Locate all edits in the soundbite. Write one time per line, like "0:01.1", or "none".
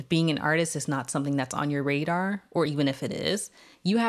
none